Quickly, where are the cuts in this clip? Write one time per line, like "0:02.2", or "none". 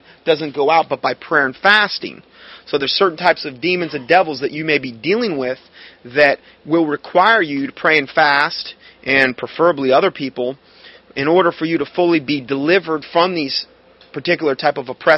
none